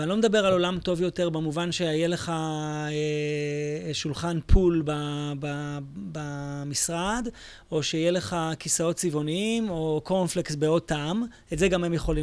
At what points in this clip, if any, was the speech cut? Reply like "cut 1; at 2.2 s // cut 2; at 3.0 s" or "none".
none

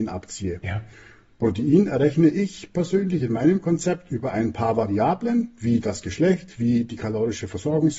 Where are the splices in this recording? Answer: none

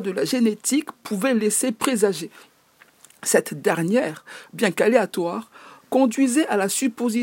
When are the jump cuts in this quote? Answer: none

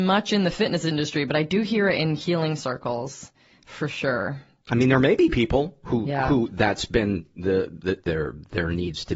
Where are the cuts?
cut 1; at 8.0 s

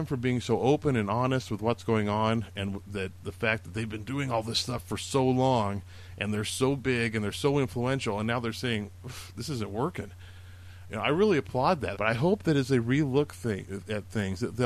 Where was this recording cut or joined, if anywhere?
cut 1; at 11.9 s

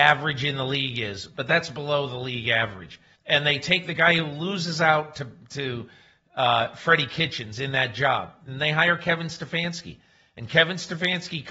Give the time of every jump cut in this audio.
cut 1; at 3.2 s

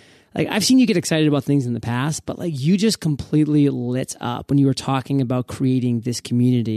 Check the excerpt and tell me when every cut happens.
none

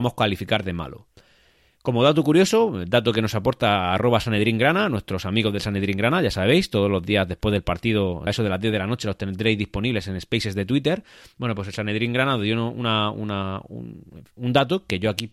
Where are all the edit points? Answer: cut 1; at 8.3 s

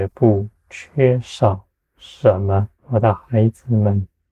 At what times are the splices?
cut 1; at 2.8 s

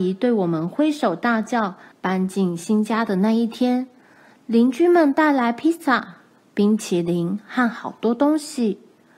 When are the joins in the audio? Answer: cut 1; at 1.9 s

